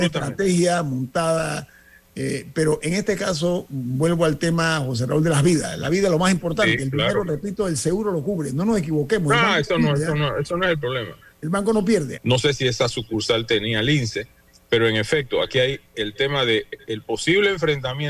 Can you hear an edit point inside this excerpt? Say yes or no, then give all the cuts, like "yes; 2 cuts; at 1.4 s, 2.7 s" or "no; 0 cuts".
yes; 1 cut; at 12.2 s